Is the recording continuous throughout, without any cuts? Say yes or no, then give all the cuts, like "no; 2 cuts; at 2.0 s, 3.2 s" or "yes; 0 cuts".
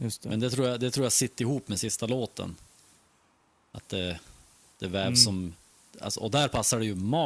yes; 0 cuts